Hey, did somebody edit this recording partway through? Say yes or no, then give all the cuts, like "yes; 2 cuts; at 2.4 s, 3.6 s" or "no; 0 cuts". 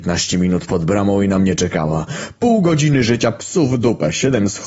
no; 0 cuts